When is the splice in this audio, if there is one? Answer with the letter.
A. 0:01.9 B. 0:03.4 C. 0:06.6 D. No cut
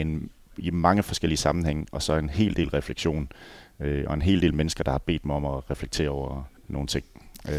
C